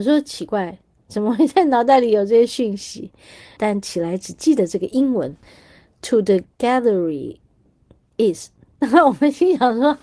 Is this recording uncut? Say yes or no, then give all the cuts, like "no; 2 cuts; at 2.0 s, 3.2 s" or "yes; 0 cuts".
no; 1 cut; at 3.6 s